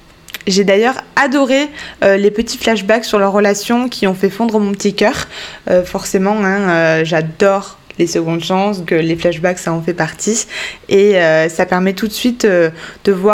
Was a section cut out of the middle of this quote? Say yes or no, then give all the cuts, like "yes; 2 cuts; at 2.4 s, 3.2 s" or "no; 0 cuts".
yes; 1 cut; at 8.9 s